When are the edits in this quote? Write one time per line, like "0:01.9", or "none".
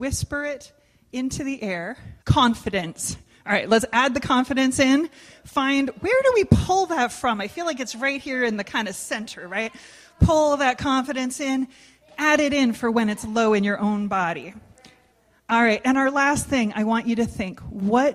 0:02.2